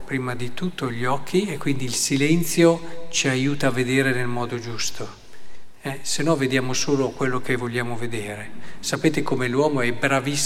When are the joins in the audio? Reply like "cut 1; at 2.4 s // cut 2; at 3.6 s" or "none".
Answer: none